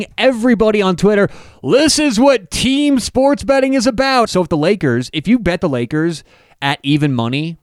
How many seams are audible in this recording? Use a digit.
1